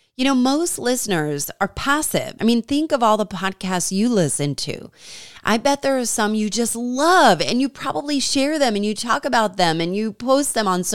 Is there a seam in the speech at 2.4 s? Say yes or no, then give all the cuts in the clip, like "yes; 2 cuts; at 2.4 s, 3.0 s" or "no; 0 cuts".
yes; 1 cut; at 2.4 s